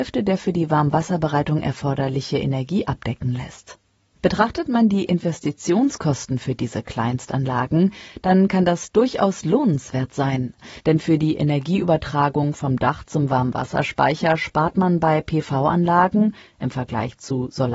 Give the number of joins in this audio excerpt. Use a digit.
0